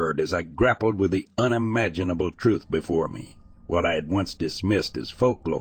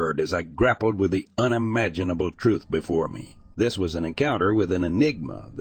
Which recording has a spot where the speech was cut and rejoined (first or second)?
second